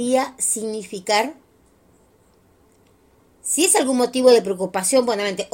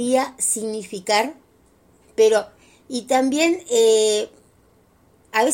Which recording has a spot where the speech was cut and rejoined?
second; 1 cut; at 2.0 s

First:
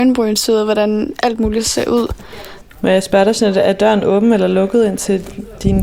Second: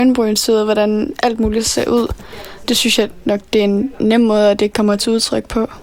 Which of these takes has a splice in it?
first; 1 cut; at 2.6 s

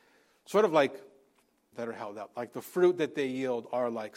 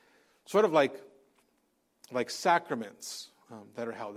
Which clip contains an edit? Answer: first; 1 cut; at 1.7 s

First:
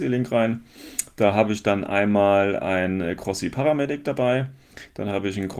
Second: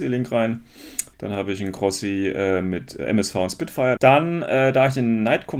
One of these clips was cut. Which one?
second; 2 cuts; at 1.1 s, 4.0 s

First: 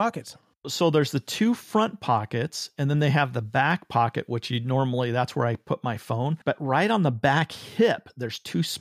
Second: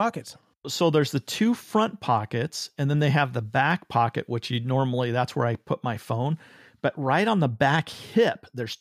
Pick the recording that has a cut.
first; 1 cut; at 6.4 s

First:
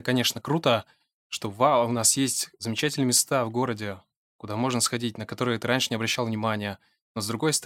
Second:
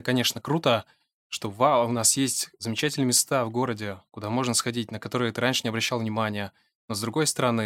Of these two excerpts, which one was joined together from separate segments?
second; 1 cut; at 4.1 s

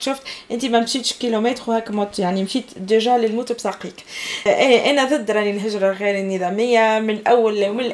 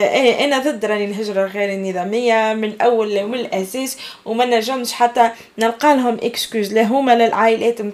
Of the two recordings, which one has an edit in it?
first; 1 cut; at 4.5 s

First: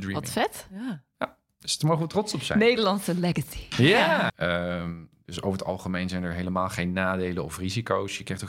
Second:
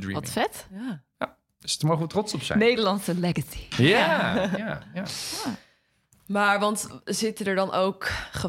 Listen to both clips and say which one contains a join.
first; 1 cut; at 4.3 s

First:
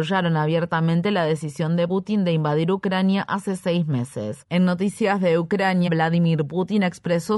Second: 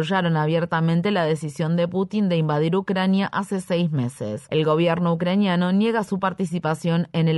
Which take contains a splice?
first; 3 cuts; at 1.9 s, 4.4 s, 5.9 s

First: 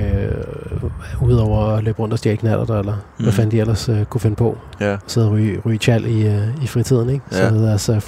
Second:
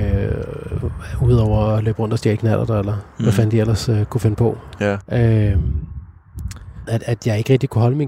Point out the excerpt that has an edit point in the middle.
second; 2 cuts; at 5.0 s, 6.9 s

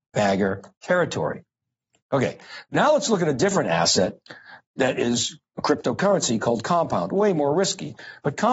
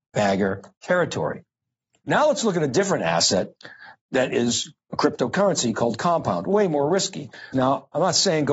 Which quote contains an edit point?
second; 2 cuts; at 2.0 s, 7.5 s

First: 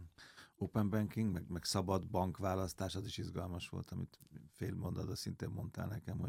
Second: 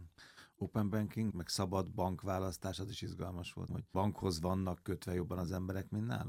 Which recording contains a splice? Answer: second; 2 cuts; at 1.3 s, 3.7 s

